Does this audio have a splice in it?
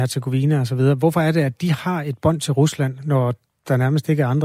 no; 0 cuts

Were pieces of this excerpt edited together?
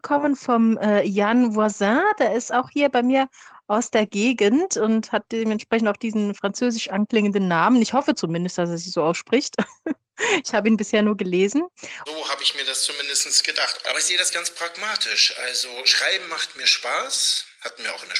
yes; 2 cuts; at 12.1 s, 13.8 s

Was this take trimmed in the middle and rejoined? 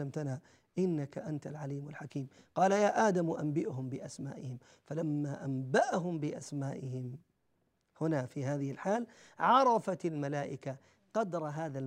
no; 0 cuts

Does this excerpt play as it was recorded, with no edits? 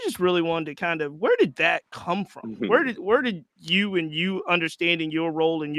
yes; 0 cuts

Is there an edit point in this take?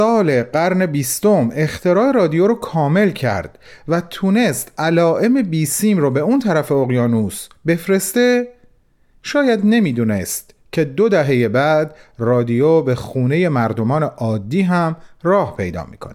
no; 0 cuts

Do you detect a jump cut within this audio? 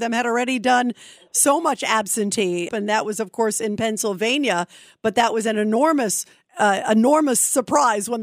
yes; 1 cut; at 2.7 s

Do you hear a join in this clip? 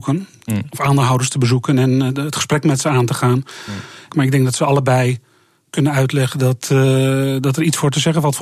yes; 1 cut; at 4.1 s

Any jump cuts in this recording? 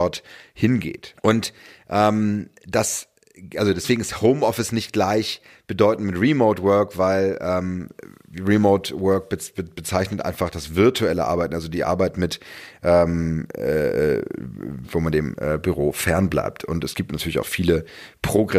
yes; 1 cut; at 1.1 s

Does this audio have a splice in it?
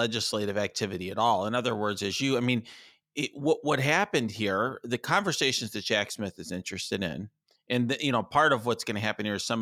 no; 0 cuts

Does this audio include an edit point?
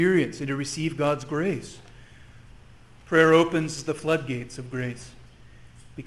no; 0 cuts

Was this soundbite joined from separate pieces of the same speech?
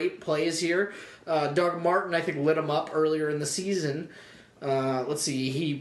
no; 0 cuts

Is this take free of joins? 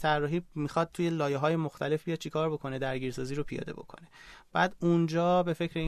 yes; 0 cuts

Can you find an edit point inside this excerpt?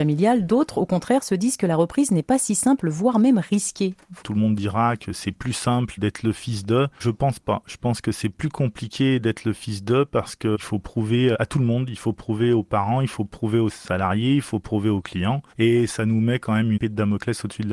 yes; 1 cut; at 15.5 s

